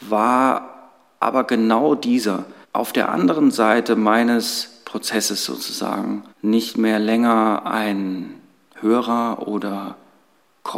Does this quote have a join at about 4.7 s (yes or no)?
no